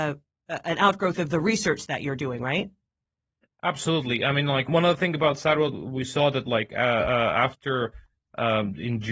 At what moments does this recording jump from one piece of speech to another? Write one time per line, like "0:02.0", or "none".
0:04.7